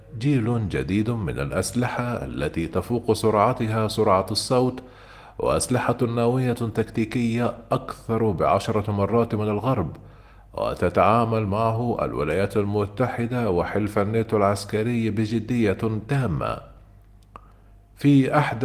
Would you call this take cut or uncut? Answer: uncut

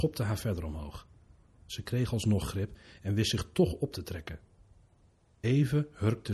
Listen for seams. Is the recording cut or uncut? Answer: uncut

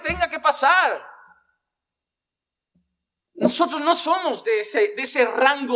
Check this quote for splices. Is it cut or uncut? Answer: uncut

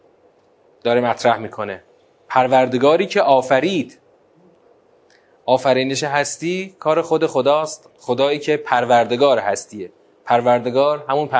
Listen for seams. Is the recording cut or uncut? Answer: uncut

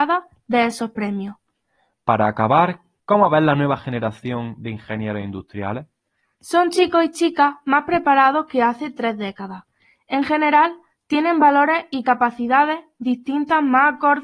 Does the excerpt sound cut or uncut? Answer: cut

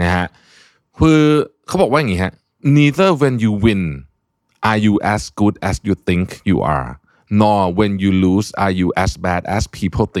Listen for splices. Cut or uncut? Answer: uncut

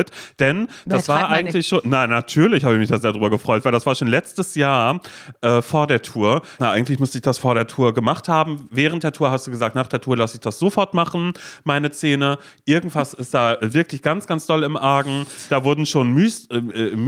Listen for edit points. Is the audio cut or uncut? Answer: cut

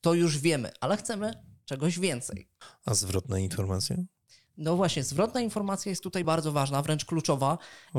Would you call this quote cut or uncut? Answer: cut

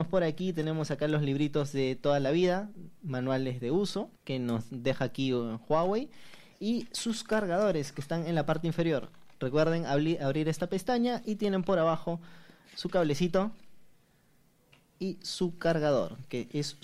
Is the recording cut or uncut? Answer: cut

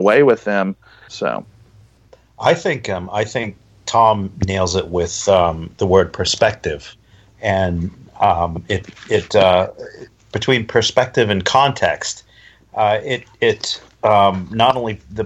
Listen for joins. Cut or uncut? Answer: cut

